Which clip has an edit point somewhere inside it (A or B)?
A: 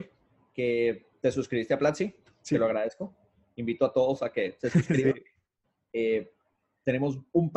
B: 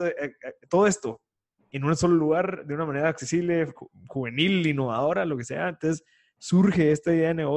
B